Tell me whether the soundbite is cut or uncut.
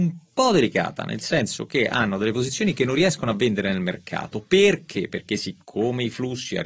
uncut